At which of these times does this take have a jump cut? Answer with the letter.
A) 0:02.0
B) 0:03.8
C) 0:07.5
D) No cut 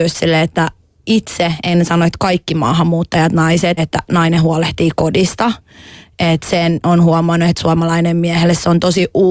B